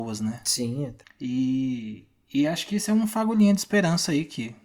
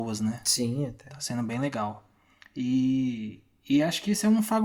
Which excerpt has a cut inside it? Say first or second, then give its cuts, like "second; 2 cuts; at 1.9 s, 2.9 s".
first; 1 cut; at 1.0 s